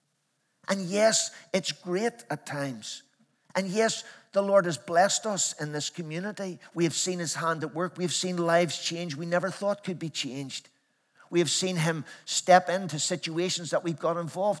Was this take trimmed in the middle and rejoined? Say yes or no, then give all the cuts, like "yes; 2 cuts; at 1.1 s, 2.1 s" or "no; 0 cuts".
no; 0 cuts